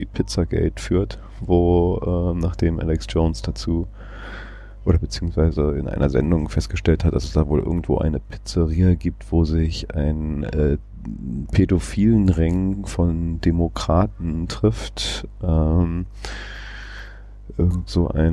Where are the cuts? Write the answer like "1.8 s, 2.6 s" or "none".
none

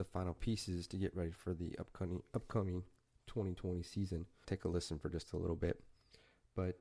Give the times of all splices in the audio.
4.4 s

